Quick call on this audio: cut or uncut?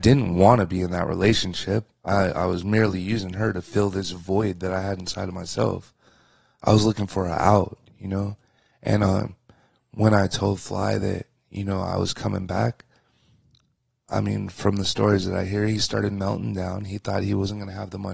uncut